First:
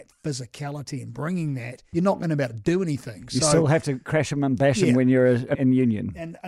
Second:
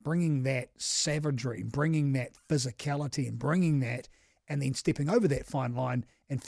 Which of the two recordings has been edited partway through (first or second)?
first